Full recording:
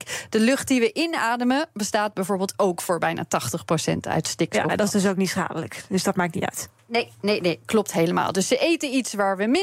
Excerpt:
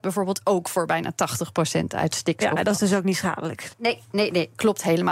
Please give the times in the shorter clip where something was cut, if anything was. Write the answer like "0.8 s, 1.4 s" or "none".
3.7 s